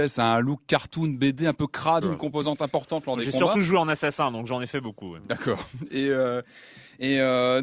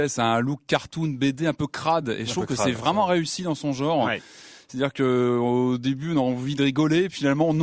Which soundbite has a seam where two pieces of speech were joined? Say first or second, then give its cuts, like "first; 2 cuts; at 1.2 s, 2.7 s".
first; 1 cut; at 2.0 s